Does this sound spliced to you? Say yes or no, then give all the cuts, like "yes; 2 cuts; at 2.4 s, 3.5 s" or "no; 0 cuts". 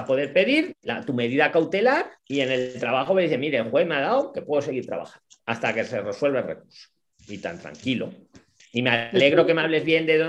yes; 2 cuts; at 2.2 s, 8.6 s